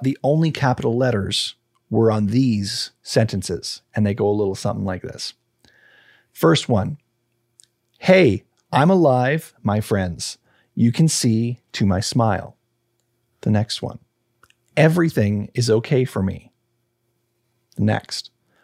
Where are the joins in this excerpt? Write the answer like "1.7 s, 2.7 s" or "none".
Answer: none